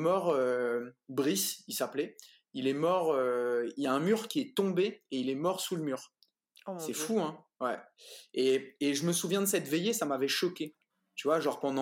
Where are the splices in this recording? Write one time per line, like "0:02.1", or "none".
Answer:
none